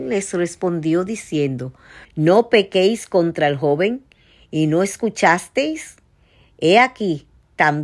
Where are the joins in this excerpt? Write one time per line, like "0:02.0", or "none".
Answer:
0:02.0